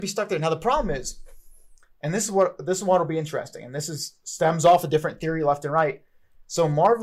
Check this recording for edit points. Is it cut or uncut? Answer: uncut